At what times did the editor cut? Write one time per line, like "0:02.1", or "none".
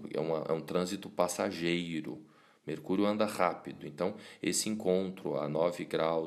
none